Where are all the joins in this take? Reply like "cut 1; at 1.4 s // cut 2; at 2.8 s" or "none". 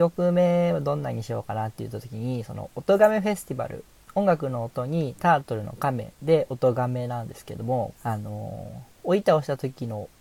cut 1; at 4.0 s // cut 2; at 7.9 s // cut 3; at 8.9 s